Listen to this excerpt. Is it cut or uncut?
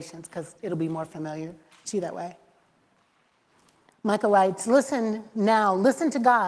uncut